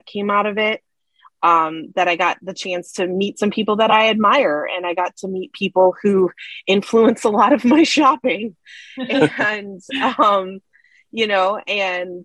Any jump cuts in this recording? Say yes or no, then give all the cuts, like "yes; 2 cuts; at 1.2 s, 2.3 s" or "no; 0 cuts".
no; 0 cuts